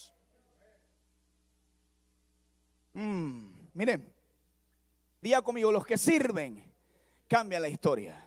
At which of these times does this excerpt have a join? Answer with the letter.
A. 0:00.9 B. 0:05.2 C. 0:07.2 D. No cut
B